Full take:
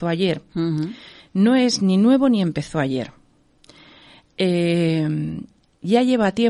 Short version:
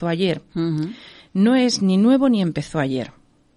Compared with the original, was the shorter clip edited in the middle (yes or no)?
no